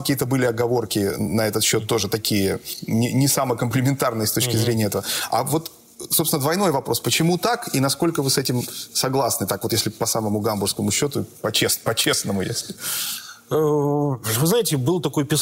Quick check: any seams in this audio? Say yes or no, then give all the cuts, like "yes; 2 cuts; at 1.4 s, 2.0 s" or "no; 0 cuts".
no; 0 cuts